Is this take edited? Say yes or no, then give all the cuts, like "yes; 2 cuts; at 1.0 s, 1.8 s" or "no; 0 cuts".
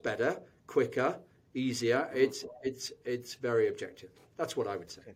no; 0 cuts